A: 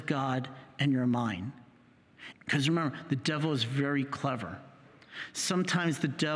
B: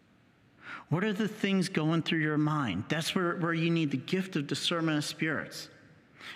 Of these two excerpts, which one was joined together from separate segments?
A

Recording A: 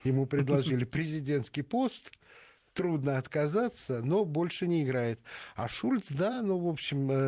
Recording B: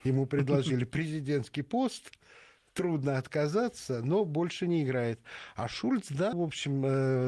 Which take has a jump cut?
B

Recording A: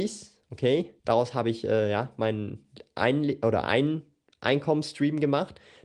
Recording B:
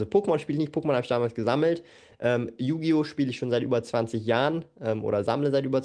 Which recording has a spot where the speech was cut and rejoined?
A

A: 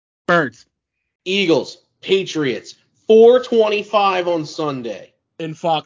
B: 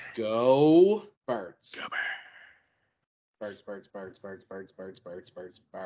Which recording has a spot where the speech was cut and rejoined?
B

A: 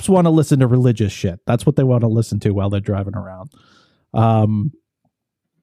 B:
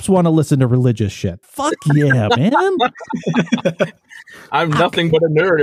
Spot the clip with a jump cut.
B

